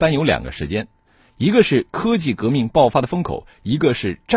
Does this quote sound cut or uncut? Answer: uncut